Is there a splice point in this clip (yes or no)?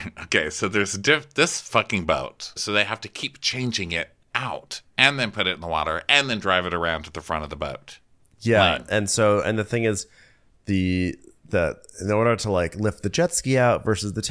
yes